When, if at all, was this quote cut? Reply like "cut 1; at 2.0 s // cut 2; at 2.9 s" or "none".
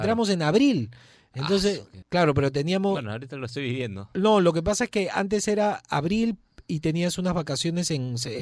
cut 1; at 2.0 s